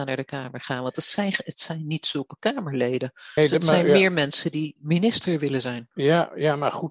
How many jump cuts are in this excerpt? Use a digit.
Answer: 1